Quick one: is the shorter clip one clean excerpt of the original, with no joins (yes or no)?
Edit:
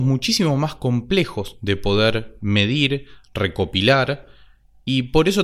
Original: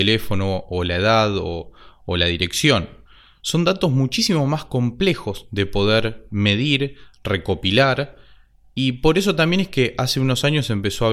yes